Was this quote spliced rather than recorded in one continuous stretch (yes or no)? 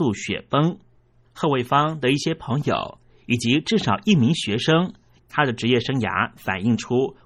yes